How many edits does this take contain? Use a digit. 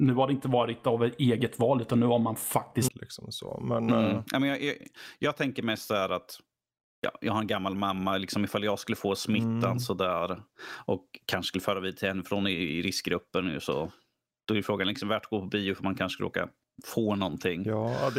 1